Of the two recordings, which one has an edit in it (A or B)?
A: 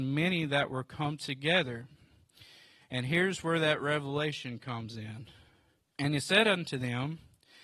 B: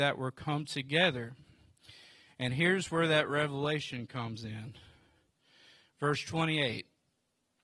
A